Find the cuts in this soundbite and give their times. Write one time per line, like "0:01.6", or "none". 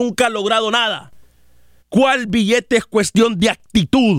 0:01.8